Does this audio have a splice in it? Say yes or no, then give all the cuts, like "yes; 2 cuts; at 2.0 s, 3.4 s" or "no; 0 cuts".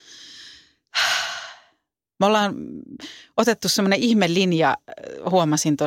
no; 0 cuts